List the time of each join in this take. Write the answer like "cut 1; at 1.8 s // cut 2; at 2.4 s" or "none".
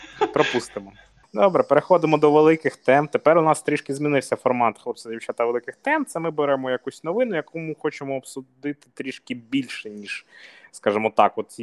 none